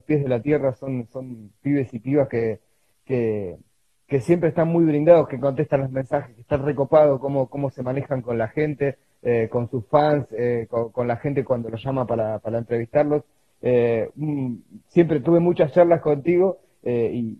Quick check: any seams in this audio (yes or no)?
no